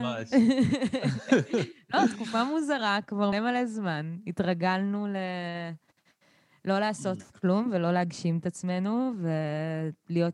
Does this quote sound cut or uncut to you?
cut